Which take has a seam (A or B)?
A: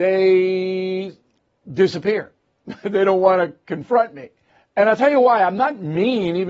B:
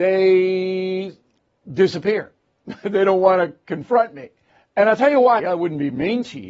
B